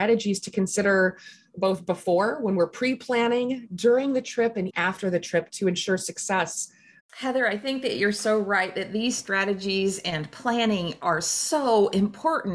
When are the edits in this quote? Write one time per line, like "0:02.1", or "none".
0:04.7
0:07.0